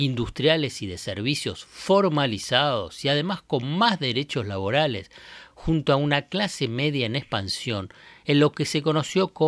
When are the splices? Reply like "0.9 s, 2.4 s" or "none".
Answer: none